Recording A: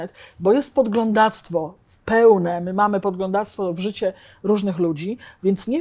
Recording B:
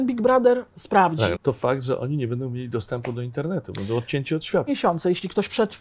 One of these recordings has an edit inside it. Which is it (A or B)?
B